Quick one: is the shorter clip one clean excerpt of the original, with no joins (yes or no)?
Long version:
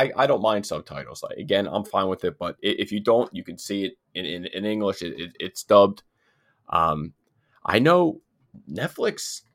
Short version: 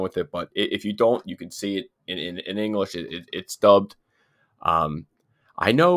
yes